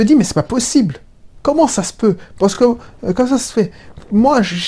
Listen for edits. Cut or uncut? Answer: uncut